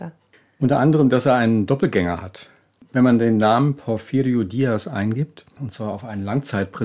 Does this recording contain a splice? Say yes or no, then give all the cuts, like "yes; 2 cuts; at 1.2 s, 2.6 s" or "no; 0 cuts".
yes; 1 cut; at 5.6 s